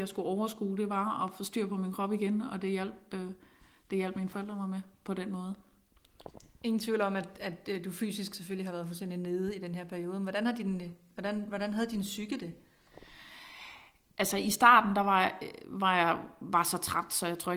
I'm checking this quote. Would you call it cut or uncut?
uncut